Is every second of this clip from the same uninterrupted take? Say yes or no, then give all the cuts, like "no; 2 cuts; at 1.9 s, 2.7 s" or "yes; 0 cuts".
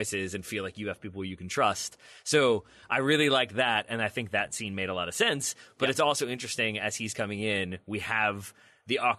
yes; 0 cuts